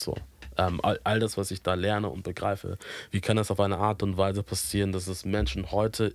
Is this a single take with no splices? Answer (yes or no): yes